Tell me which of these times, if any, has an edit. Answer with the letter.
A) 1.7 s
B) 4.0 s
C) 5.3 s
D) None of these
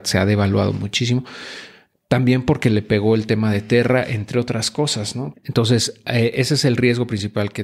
C